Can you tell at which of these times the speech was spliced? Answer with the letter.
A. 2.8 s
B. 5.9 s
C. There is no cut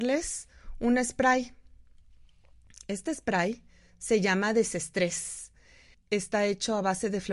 B